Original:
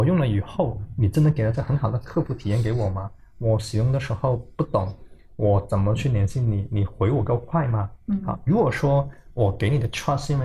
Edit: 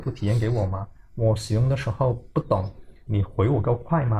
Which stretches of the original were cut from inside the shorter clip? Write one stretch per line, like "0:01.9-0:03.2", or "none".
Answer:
0:05.3-0:06.7